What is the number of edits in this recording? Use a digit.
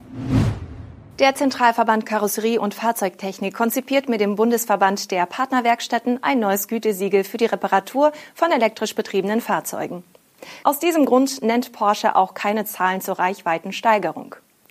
1